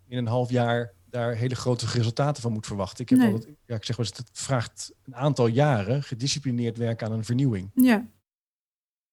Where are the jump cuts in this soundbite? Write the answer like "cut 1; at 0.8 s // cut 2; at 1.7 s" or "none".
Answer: cut 1; at 1.0 s